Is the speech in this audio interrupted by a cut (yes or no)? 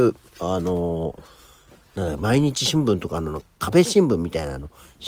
no